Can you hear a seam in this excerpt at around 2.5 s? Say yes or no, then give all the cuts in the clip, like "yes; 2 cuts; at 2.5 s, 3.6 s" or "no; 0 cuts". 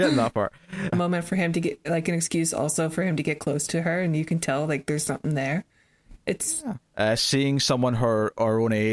no; 2 cuts; at 0.9 s, 6.8 s